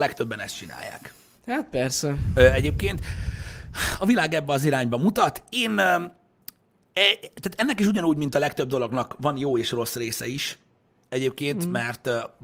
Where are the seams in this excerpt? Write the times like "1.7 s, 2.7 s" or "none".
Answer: none